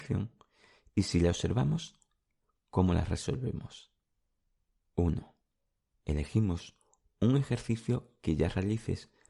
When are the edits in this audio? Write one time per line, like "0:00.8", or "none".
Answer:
0:04.9